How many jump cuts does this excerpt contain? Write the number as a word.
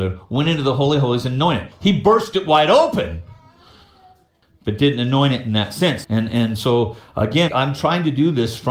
two